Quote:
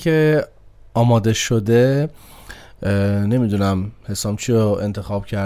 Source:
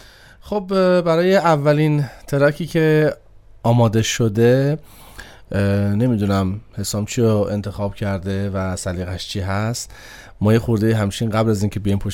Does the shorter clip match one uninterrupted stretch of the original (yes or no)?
yes